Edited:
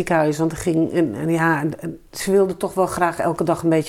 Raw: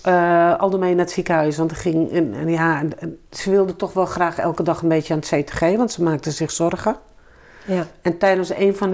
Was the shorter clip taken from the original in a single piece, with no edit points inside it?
yes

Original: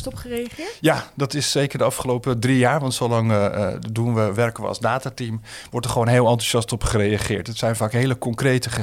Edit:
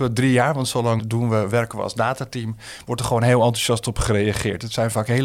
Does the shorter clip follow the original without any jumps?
no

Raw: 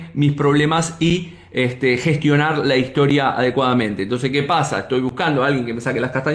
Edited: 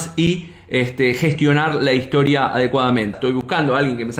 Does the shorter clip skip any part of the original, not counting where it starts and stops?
yes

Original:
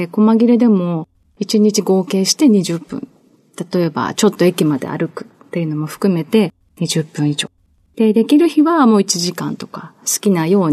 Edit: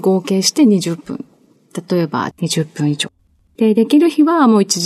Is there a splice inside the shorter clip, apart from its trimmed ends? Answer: yes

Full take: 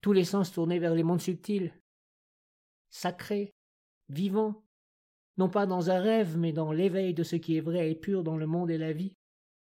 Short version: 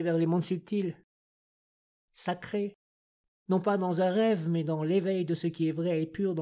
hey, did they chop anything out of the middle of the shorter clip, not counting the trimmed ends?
yes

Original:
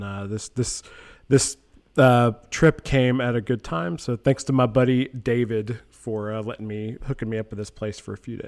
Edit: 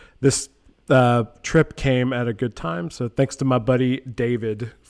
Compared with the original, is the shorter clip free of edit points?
yes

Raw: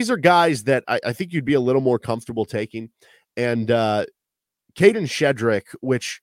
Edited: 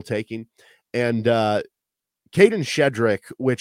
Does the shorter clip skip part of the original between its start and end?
no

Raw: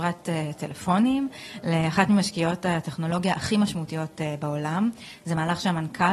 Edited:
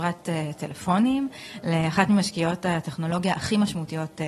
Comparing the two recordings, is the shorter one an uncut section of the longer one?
yes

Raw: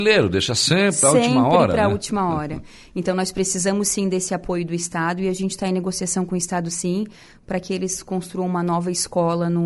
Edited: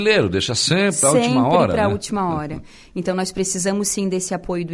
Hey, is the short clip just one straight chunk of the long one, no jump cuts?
yes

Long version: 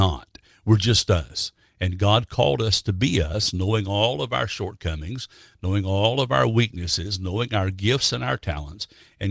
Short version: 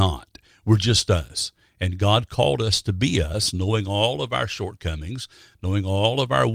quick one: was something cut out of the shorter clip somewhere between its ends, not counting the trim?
no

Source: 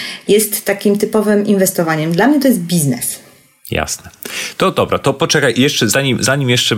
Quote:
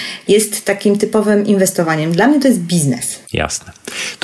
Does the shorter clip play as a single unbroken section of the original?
no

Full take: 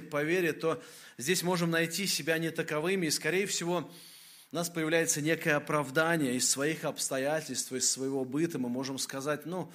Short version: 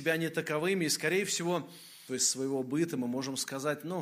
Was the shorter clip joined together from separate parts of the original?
yes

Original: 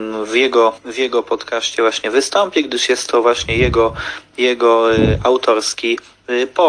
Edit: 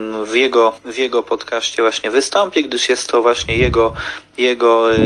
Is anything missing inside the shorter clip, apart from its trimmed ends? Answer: no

